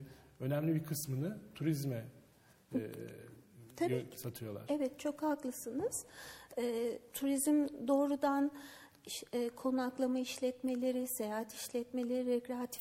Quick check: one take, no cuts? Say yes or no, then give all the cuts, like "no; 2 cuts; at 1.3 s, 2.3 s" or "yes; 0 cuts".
yes; 0 cuts